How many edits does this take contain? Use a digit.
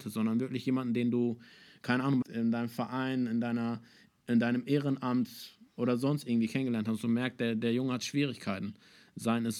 1